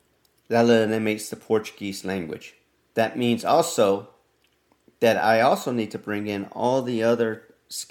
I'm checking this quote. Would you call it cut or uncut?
cut